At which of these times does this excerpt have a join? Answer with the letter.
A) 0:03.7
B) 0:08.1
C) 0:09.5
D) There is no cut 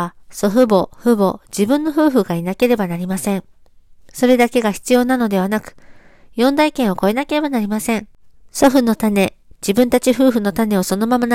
C